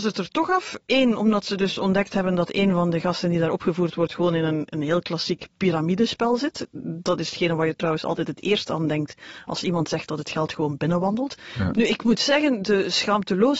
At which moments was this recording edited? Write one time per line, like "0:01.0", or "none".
0:11.7